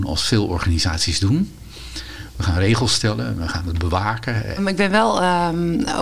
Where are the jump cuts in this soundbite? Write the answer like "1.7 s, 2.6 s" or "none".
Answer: 4.6 s